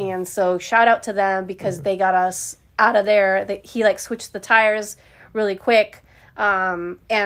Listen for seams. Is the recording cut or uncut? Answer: uncut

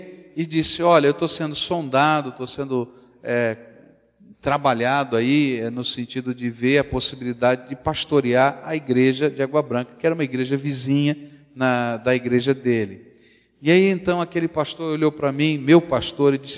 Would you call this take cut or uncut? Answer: uncut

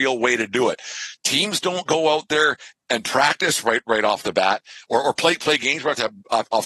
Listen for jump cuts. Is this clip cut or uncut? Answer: uncut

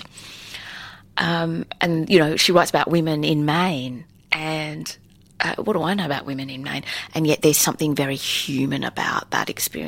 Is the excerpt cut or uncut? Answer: uncut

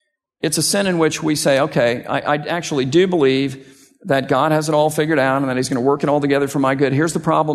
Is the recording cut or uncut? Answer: uncut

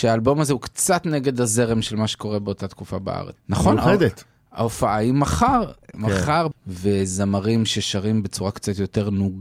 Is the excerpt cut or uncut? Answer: cut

